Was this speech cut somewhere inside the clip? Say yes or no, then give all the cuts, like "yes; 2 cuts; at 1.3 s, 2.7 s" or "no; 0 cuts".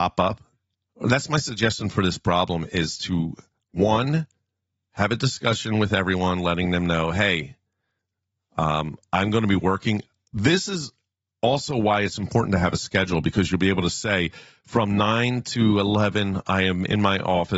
no; 0 cuts